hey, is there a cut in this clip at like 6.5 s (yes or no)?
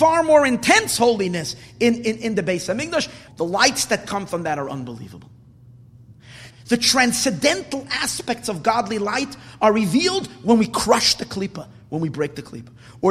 yes